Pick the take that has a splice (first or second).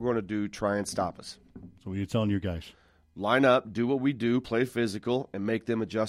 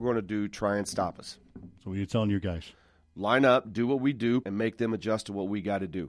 second